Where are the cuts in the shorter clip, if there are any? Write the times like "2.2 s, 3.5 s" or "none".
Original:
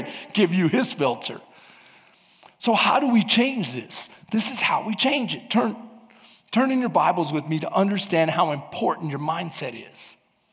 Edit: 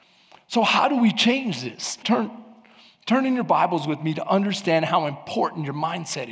2.0 s